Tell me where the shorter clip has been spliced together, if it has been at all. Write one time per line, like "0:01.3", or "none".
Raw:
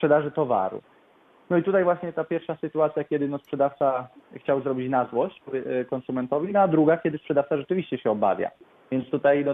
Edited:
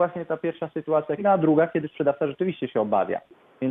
0:01.2